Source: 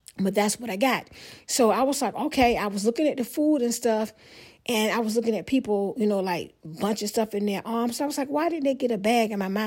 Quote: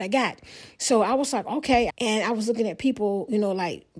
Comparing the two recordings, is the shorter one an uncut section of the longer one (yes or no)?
no